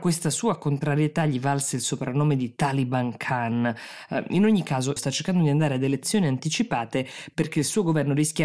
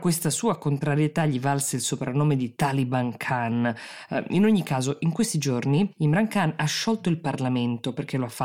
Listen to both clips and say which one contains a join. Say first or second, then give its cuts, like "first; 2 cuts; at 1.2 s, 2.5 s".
first; 1 cut; at 5.0 s